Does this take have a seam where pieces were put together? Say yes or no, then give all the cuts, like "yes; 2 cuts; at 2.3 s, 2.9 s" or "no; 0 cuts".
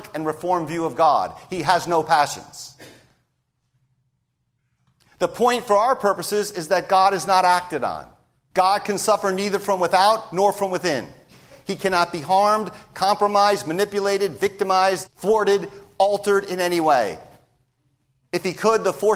yes; 2 cuts; at 8.5 s, 15.1 s